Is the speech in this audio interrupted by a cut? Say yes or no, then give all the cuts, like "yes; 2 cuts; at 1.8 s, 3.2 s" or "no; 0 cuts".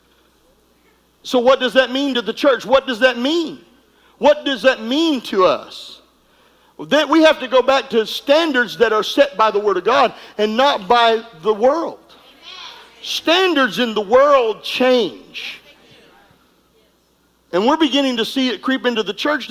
no; 0 cuts